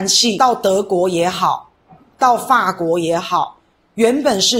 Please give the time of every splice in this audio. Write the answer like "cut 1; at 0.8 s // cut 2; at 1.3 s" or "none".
none